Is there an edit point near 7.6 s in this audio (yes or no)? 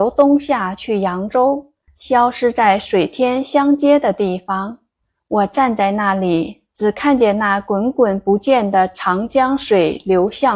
no